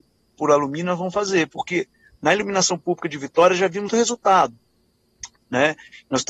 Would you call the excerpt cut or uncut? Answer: cut